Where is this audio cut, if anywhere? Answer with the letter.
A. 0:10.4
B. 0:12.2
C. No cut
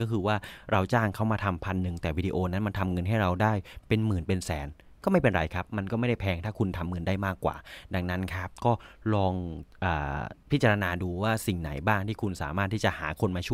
A